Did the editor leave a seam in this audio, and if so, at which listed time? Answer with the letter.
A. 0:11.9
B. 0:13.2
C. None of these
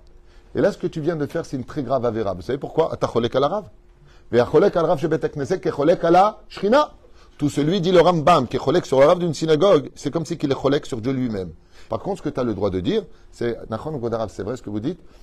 A